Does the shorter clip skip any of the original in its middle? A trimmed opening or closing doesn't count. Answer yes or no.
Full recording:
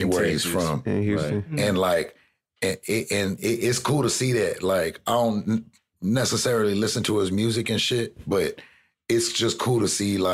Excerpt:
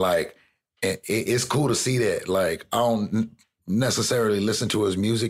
yes